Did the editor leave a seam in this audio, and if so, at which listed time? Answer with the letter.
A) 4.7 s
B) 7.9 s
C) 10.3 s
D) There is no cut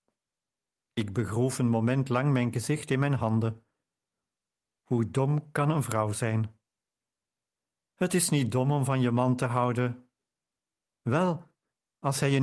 D